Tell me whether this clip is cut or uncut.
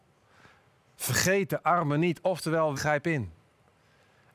cut